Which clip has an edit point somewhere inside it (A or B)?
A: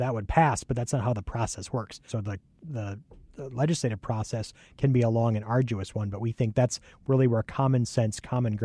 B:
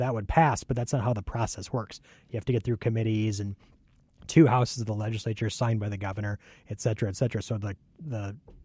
A